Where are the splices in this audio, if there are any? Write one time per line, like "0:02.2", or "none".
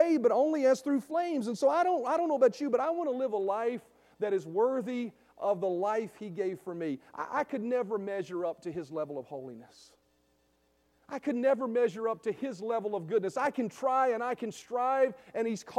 none